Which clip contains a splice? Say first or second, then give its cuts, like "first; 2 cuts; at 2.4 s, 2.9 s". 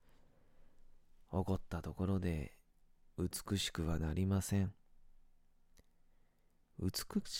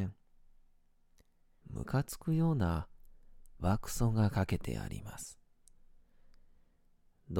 second; 2 cuts; at 1.6 s, 3.6 s